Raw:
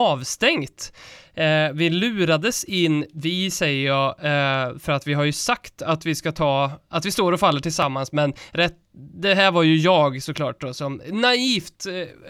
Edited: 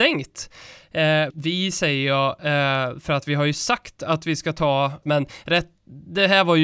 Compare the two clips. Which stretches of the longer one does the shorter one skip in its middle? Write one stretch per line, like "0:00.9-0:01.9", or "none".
0:01.7-0:03.1
0:06.8-0:08.1